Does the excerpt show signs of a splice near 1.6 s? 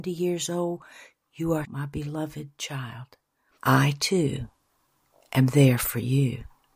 yes; 2 cuts; at 1.6 s, 3.6 s

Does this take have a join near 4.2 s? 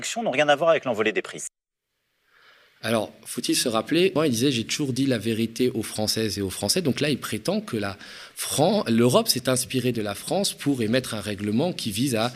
yes; 1 cut; at 4.2 s

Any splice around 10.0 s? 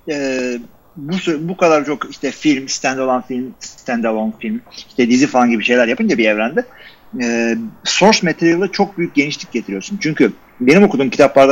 no; 0 cuts

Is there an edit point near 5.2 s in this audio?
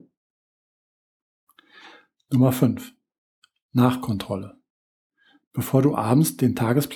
no; 0 cuts

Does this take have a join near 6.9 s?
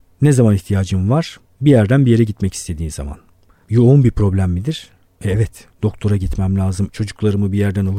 yes; 1 cut; at 6.9 s

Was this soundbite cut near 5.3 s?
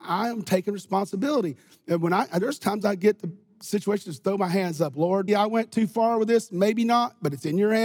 yes; 1 cut; at 5.3 s

